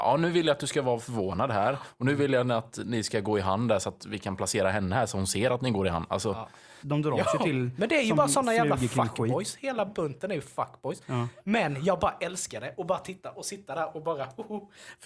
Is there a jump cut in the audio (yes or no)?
yes